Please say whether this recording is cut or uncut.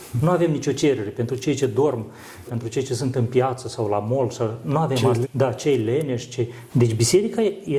cut